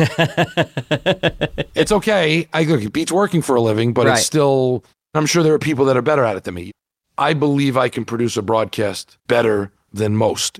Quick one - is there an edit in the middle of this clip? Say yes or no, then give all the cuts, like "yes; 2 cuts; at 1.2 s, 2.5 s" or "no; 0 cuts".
yes; 1 cut; at 9.2 s